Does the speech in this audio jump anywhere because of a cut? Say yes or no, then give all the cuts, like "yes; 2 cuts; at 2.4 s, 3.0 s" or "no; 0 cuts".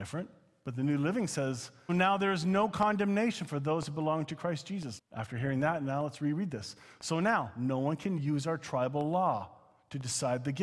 yes; 2 cuts; at 1.9 s, 5.0 s